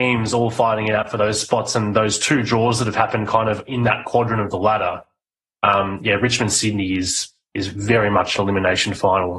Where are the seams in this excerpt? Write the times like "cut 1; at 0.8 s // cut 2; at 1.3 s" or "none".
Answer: none